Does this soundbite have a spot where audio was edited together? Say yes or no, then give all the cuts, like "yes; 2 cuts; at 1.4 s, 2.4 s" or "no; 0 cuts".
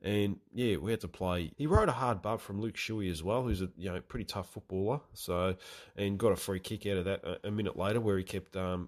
yes; 1 cut; at 1.5 s